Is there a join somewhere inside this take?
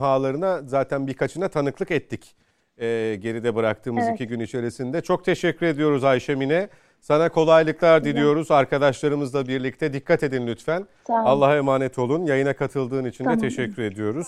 no; 0 cuts

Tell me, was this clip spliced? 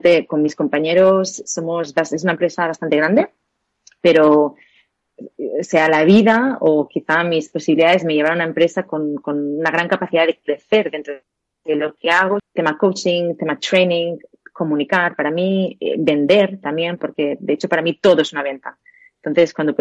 yes; 1 cut; at 12.4 s

